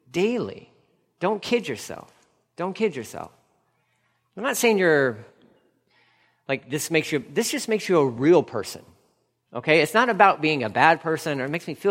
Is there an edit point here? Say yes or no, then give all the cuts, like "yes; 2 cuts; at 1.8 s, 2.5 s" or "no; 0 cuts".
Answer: no; 0 cuts